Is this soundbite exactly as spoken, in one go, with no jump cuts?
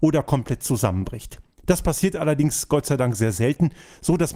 yes; 0 cuts

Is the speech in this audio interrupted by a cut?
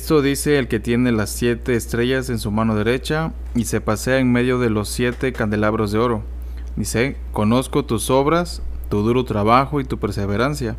no; 0 cuts

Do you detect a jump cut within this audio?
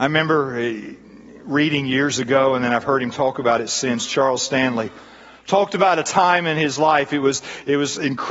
no; 0 cuts

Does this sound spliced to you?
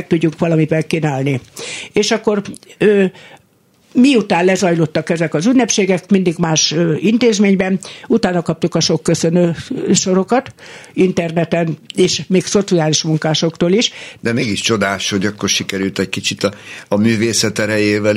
yes; 1 cut; at 14.2 s

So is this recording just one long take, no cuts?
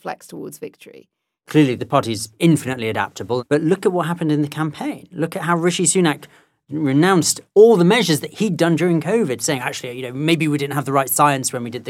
yes; 0 cuts

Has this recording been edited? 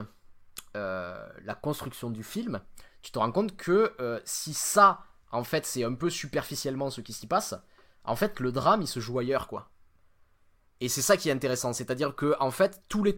no; 0 cuts

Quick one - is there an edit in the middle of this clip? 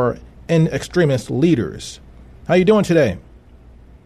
no; 0 cuts

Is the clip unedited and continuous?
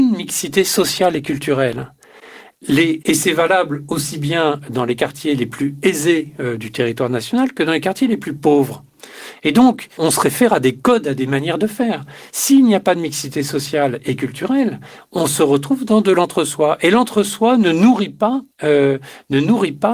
no; 3 cuts; at 3.0 s, 10.0 s, 18.5 s

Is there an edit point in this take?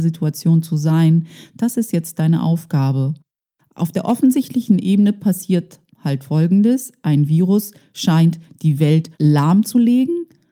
yes; 1 cut; at 9.1 s

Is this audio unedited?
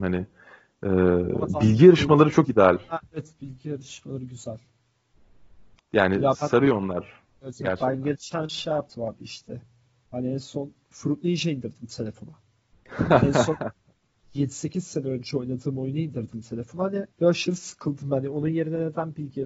no; 1 cut; at 17.1 s

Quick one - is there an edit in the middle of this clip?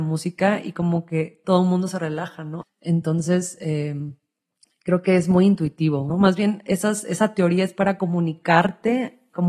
yes; 2 cuts; at 2.6 s, 6.1 s

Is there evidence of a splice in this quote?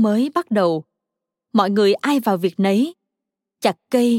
no; 0 cuts

